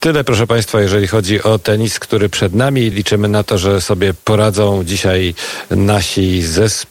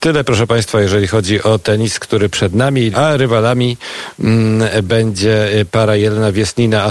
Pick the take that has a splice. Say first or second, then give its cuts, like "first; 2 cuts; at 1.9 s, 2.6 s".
second; 1 cut; at 2.9 s